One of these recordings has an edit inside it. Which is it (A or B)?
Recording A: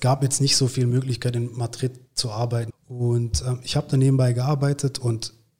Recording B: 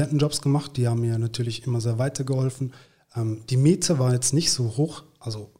A